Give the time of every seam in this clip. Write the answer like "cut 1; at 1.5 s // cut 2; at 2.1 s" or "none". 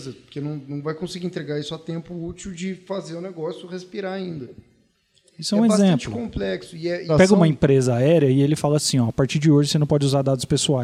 cut 1; at 7.1 s